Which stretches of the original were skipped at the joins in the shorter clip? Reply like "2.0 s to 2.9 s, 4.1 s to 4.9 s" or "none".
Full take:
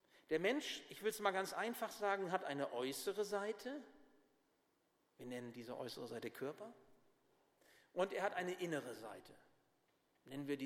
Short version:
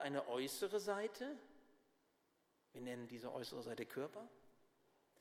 none